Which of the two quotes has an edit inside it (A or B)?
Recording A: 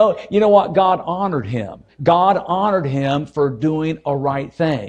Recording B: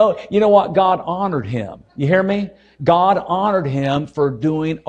A